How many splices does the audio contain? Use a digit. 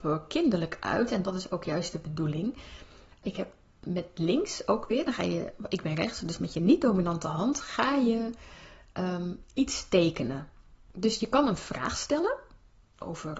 1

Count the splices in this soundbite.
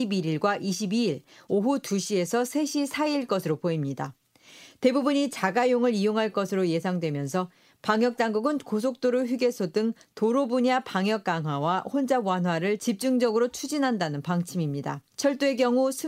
1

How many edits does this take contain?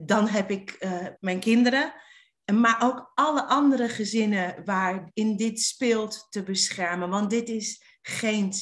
1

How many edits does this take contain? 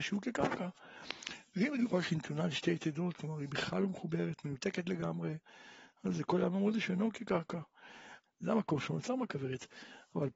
1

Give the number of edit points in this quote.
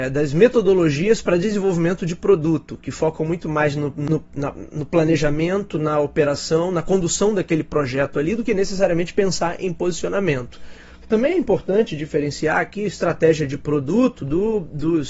1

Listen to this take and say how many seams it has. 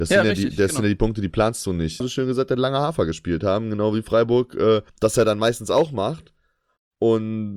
2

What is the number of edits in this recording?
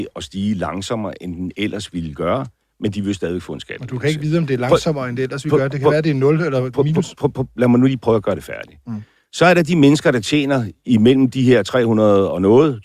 0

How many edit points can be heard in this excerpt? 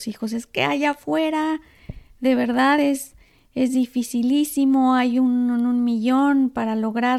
0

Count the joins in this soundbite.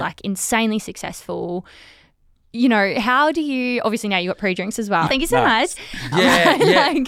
2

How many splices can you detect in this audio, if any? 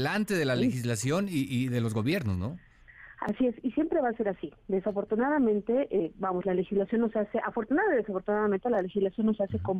0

